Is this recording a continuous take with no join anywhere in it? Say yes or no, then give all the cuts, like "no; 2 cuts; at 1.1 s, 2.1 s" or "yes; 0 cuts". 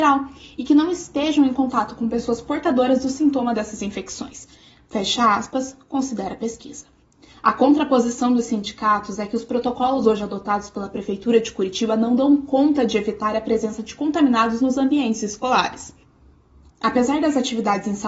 no; 1 cut; at 16.7 s